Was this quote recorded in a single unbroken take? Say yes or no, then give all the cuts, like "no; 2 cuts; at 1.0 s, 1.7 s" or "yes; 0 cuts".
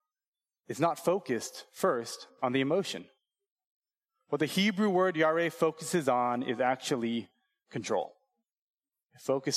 yes; 0 cuts